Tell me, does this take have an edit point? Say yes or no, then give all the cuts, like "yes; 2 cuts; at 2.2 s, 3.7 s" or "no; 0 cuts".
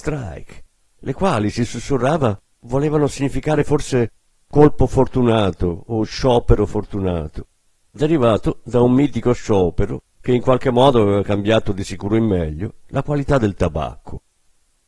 no; 0 cuts